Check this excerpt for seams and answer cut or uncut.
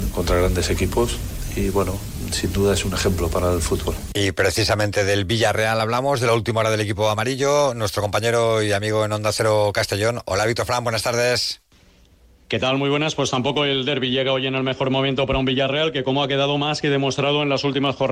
uncut